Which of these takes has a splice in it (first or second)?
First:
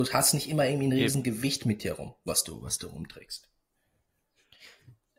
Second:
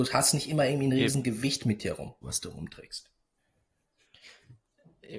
second